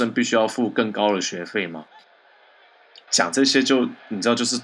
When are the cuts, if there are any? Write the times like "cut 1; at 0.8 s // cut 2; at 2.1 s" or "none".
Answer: cut 1; at 3.1 s